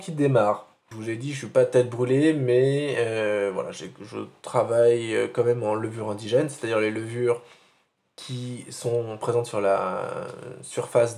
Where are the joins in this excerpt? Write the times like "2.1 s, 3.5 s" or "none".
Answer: none